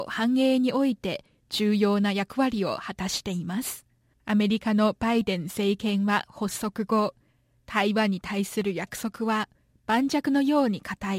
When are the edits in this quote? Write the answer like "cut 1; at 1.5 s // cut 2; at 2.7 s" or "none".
cut 1; at 4.1 s